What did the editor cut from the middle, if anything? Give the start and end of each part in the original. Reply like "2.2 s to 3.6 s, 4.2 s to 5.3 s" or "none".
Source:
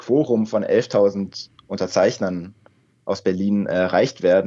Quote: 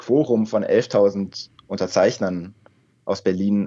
none

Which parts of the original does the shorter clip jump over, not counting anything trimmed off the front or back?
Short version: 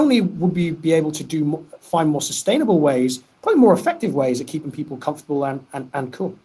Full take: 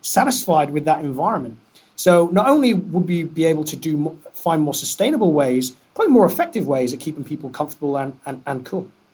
none

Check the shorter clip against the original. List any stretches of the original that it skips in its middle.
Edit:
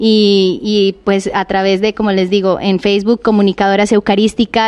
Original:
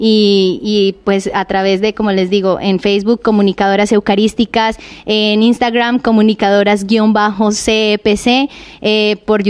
none

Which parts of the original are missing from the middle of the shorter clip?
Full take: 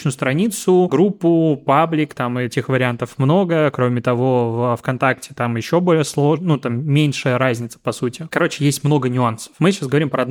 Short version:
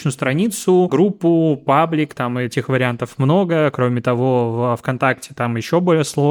none

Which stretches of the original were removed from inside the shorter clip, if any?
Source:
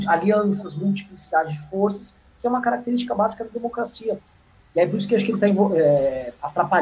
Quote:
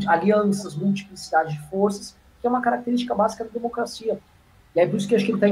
none

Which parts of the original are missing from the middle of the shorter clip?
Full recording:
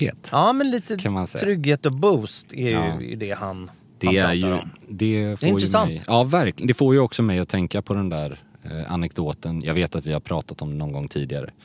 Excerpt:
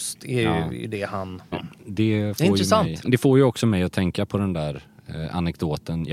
3.8 s to 4.5 s, 6.1 s to 6.6 s

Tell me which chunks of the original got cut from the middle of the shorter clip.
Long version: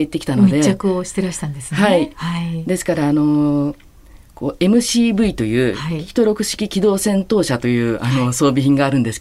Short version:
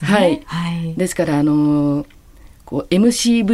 none

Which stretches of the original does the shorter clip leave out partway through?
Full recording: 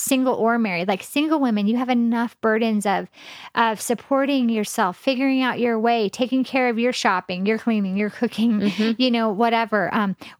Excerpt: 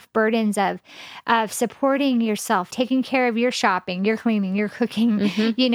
5.0 s to 6.1 s

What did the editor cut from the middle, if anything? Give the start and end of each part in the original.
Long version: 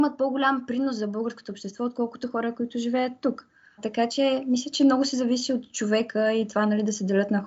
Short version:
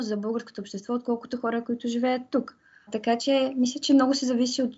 none

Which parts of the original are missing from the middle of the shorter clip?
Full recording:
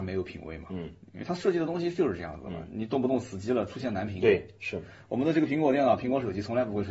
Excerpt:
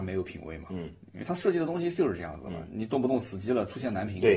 none

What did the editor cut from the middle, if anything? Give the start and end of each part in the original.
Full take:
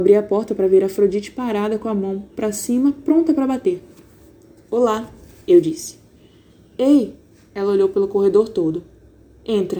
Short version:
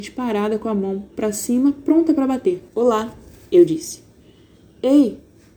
3.9 s to 4.6 s

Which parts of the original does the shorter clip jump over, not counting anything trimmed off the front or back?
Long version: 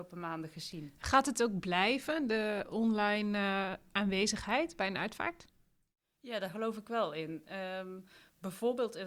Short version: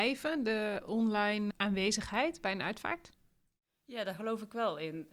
3.3 s to 3.9 s

